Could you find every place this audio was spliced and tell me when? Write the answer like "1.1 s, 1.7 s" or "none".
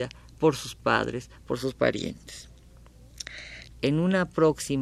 3.7 s